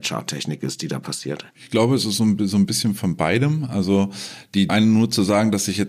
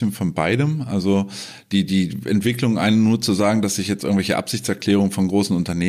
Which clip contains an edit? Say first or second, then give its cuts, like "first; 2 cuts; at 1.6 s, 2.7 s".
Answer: first; 2 cuts; at 1.5 s, 4.7 s